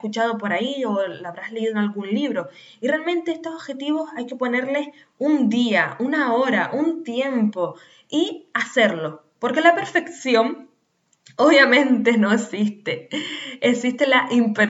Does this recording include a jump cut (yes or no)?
no